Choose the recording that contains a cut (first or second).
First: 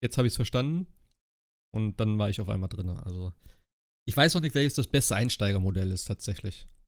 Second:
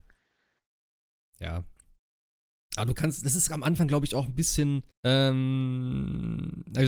second